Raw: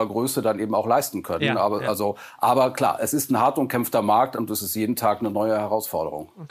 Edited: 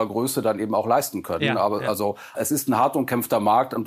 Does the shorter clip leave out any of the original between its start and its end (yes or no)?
yes